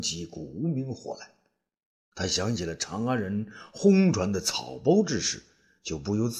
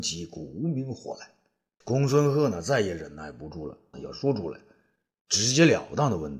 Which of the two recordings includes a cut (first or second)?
second